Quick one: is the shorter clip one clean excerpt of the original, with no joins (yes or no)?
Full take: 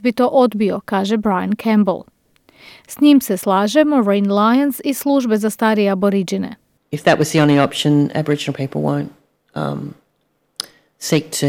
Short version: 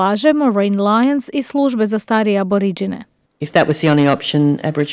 yes